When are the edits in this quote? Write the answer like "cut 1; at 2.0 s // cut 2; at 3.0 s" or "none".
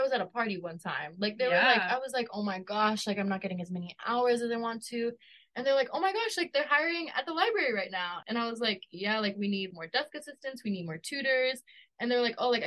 cut 1; at 8.2 s // cut 2; at 9.7 s